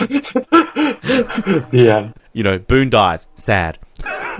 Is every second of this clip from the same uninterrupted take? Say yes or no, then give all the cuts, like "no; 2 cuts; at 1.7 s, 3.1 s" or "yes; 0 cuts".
no; 1 cut; at 2.2 s